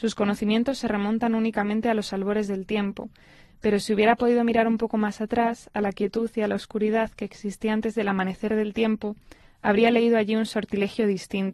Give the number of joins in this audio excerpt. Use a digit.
0